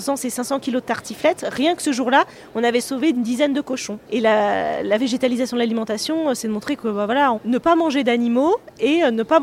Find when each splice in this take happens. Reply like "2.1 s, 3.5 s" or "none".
4.0 s, 7.3 s